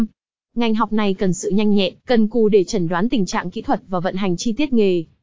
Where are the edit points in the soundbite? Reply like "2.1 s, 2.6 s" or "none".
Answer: 2.0 s